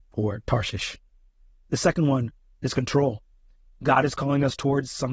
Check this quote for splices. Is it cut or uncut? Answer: uncut